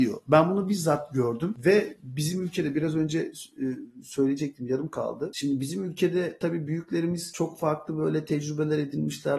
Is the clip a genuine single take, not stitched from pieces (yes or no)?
yes